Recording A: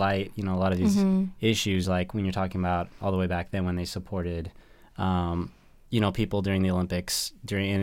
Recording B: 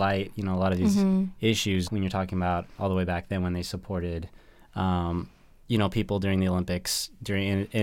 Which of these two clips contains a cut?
B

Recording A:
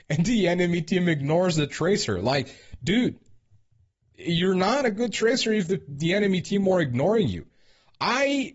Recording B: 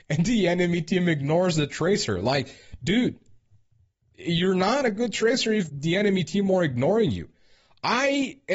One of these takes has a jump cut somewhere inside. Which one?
B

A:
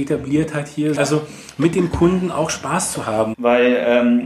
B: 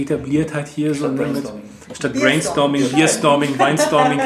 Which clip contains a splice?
A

